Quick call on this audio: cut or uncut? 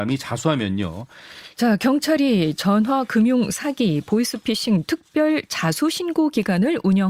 cut